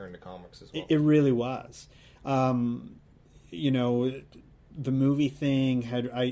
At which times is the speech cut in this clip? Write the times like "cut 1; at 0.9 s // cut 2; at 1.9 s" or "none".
none